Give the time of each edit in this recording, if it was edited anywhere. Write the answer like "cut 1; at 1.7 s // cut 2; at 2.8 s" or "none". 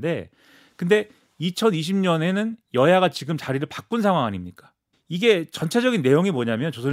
cut 1; at 4.9 s